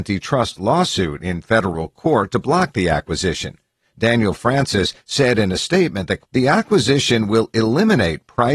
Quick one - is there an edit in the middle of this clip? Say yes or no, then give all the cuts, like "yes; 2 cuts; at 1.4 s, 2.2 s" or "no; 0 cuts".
yes; 2 cuts; at 5.0 s, 6.2 s